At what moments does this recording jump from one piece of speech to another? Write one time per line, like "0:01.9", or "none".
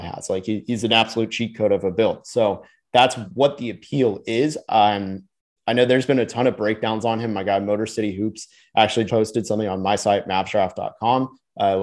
0:09.1